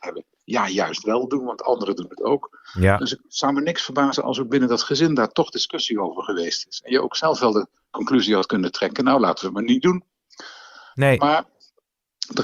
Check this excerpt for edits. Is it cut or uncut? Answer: uncut